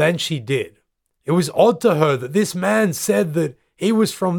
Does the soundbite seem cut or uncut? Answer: cut